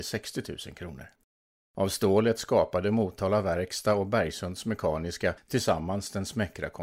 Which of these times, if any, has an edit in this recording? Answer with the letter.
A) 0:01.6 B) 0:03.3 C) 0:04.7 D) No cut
A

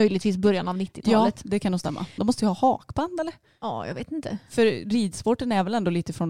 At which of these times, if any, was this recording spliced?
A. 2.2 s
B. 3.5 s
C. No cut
A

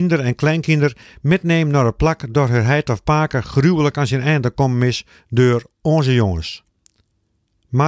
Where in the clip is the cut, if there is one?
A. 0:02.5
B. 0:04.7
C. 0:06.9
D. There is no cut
D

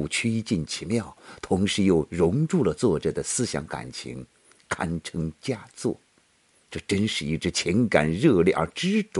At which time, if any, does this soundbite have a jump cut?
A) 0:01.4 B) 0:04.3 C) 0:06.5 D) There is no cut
C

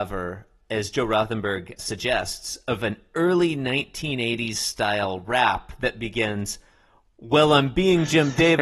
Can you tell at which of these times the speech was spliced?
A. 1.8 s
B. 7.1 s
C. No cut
A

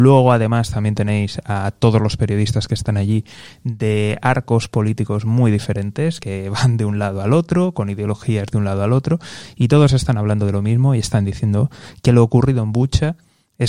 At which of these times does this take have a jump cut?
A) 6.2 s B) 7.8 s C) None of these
C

